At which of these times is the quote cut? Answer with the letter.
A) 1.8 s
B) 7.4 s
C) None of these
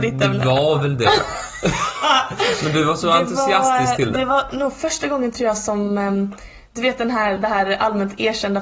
B